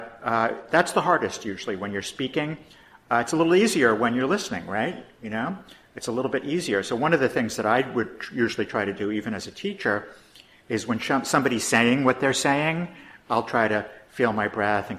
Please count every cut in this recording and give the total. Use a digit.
0